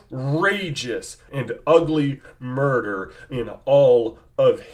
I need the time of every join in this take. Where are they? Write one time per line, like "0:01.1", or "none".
0:01.3